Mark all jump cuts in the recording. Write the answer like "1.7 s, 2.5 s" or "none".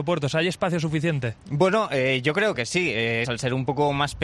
3.2 s